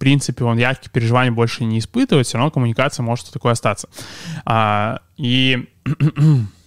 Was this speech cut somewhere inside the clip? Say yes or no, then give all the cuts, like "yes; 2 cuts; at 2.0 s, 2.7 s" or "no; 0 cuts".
no; 0 cuts